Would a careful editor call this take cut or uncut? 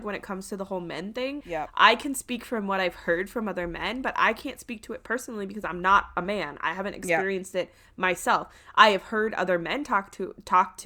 cut